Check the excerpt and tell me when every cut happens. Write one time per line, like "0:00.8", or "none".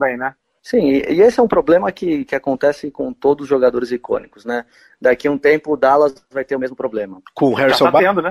none